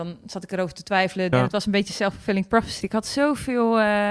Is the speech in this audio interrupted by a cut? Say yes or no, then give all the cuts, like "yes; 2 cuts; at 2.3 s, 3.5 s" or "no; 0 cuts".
yes; 2 cuts; at 1.3 s, 2.8 s